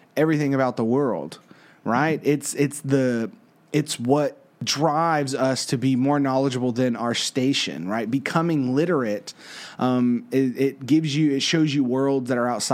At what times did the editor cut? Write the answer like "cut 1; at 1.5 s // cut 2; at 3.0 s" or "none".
none